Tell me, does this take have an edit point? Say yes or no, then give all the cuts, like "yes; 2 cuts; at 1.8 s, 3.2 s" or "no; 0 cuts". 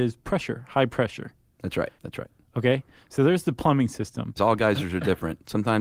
yes; 2 cuts; at 2.0 s, 4.4 s